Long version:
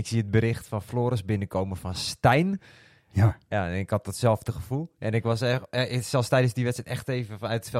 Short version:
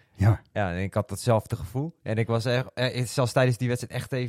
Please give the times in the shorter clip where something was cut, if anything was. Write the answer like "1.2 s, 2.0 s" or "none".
none